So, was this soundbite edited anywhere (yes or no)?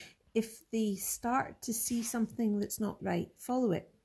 yes